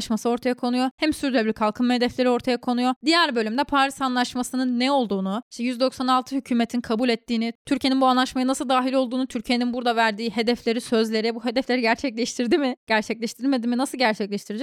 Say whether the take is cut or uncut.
uncut